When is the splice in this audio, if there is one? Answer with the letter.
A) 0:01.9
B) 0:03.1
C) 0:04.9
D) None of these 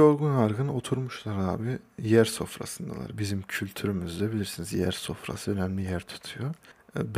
D